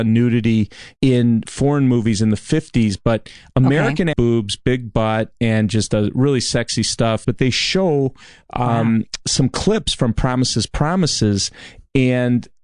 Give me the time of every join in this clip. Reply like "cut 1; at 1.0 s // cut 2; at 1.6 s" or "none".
cut 1; at 1.0 s // cut 2; at 4.1 s // cut 3; at 7.2 s